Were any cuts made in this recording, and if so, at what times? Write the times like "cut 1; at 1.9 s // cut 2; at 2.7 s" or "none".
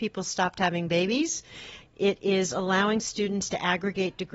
cut 1; at 1.8 s